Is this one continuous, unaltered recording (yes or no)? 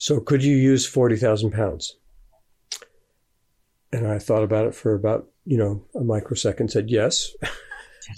yes